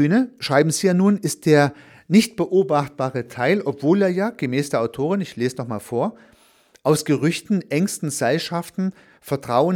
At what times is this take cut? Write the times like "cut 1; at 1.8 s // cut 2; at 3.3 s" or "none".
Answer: none